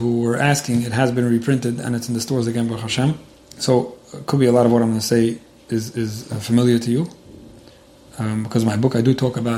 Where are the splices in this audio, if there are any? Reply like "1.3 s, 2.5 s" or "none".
none